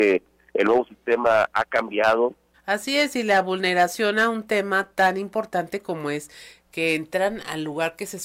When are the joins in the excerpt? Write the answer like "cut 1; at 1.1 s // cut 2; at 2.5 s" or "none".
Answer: cut 1; at 2.5 s